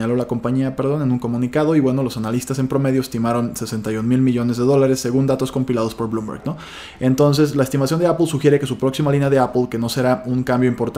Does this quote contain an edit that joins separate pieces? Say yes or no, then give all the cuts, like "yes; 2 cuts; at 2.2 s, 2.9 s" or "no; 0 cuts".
no; 0 cuts